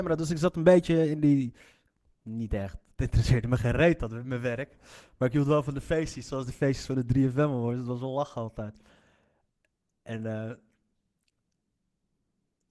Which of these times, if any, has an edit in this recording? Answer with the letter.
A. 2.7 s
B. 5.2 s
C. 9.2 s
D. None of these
D